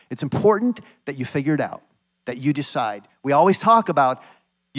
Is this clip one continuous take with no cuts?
yes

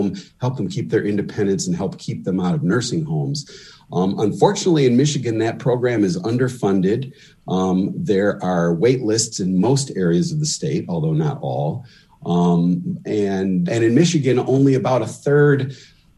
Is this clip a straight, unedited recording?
no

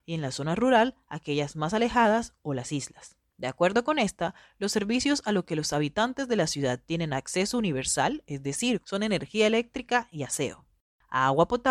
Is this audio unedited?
no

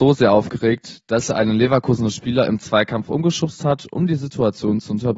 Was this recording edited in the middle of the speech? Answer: no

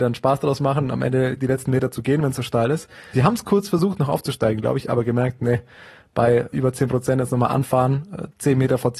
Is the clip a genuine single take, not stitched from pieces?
no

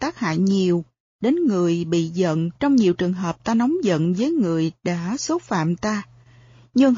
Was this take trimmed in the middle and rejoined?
yes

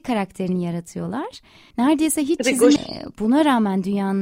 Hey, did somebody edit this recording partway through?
yes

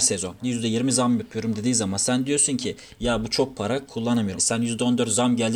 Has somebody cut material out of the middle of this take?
yes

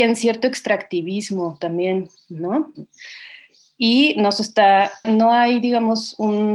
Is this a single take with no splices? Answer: no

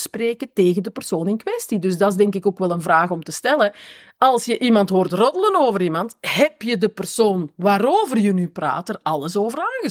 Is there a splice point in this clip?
no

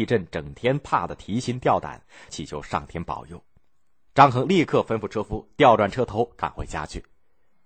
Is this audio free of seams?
no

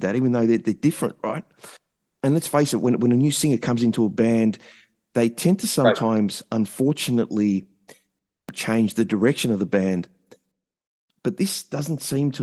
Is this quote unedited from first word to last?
yes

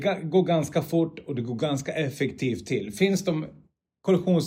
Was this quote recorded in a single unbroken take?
yes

